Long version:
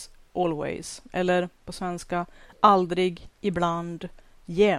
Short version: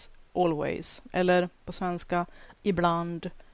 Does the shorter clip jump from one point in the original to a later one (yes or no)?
yes